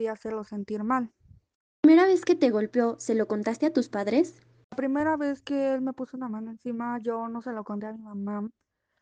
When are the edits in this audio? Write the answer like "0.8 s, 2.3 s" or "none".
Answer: none